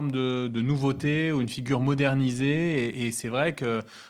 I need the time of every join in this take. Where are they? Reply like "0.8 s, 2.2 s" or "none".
none